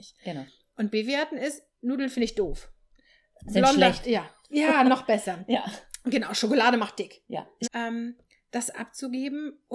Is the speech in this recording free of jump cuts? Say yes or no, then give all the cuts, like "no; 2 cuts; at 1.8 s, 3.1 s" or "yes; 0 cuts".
no; 1 cut; at 7.6 s